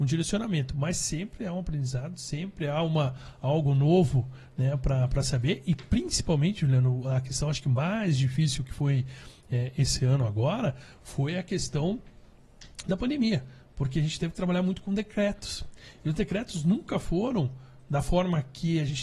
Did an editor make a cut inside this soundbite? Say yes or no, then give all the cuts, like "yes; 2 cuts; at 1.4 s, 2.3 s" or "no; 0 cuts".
no; 0 cuts